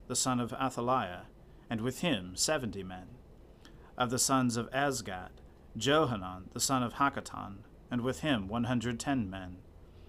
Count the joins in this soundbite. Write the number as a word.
one